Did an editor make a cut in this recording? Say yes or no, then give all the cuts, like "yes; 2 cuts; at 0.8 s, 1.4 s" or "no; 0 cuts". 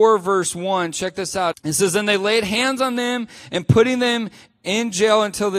yes; 1 cut; at 1.5 s